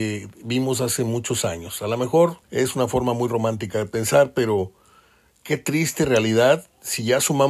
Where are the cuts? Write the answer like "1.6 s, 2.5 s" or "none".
2.4 s

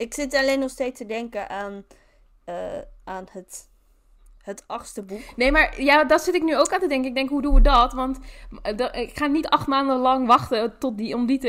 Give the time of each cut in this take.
none

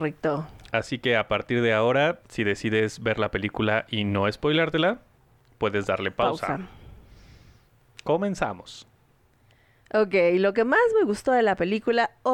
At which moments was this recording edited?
none

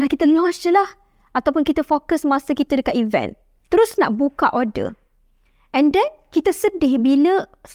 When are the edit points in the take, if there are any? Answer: none

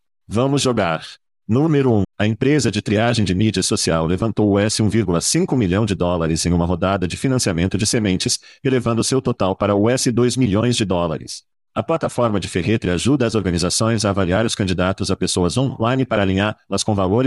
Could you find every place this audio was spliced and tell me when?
2.0 s

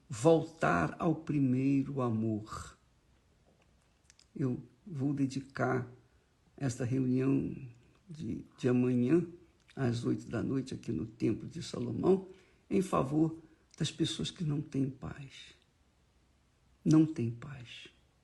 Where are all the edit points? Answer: none

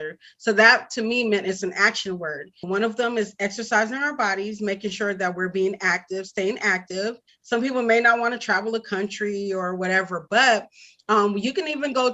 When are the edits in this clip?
2.6 s, 7.3 s

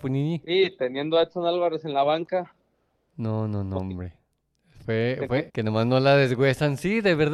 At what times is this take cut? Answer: 5.5 s

